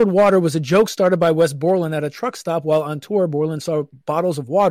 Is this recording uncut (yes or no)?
yes